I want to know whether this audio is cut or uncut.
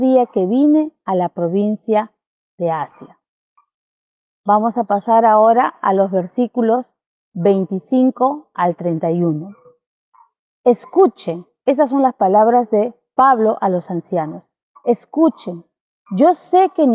uncut